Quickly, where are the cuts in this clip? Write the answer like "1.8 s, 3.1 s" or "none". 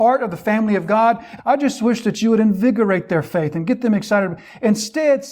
1.4 s